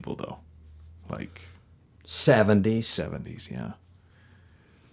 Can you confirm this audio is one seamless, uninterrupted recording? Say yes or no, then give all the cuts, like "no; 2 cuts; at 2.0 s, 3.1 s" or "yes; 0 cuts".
no; 1 cut; at 1.9 s